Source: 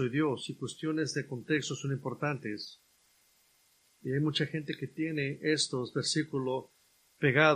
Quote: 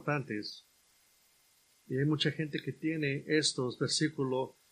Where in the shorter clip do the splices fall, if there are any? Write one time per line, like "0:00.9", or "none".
none